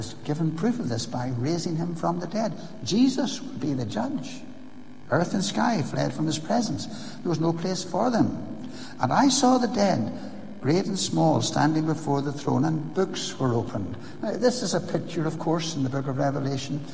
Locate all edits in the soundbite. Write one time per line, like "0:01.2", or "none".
0:05.0

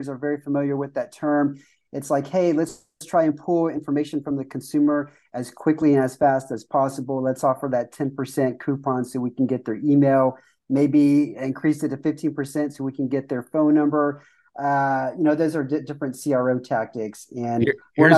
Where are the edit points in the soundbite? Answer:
none

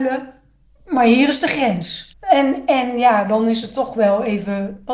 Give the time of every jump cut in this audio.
0:02.1

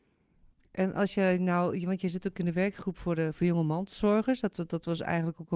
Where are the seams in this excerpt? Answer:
none

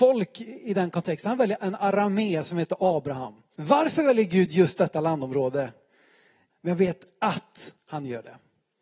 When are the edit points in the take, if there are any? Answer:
0:03.5
0:06.5

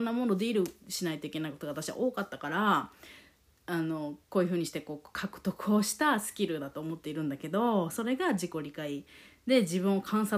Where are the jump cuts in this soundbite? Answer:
0:04.2

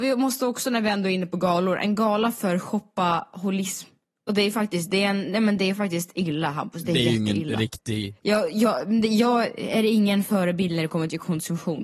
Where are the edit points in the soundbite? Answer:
none

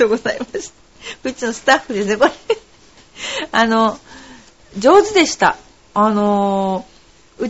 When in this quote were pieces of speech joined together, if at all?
none

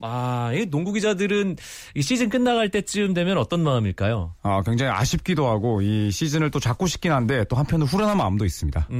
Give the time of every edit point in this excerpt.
0:04.4

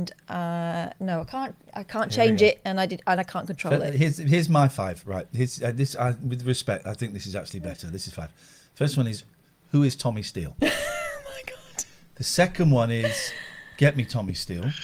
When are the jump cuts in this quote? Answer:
none

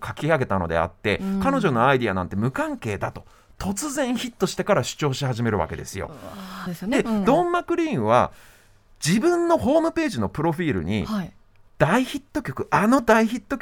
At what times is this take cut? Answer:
0:06.7

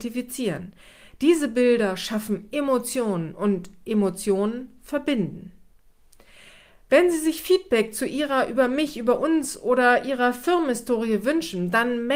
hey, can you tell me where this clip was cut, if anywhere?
none

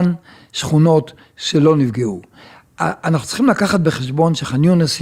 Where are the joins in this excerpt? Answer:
none

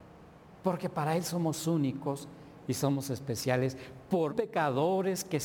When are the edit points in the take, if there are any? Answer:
0:04.3

